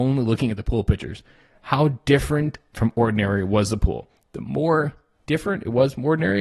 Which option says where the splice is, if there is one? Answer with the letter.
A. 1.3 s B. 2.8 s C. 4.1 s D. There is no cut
D